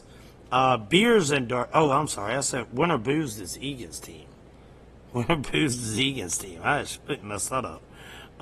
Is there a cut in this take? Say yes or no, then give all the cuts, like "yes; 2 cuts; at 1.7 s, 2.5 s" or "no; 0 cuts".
no; 0 cuts